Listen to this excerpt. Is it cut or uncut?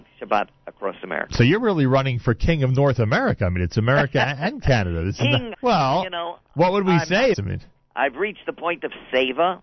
cut